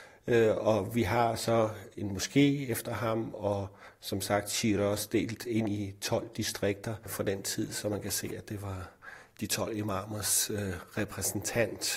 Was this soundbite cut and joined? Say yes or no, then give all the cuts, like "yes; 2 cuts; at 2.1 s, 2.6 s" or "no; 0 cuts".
no; 0 cuts